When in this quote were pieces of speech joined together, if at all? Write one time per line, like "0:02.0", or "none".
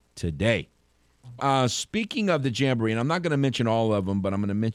0:01.4